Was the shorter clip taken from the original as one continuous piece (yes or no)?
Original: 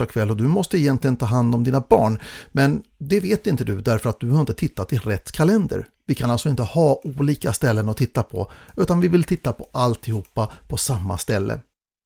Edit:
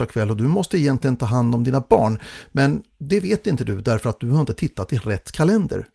yes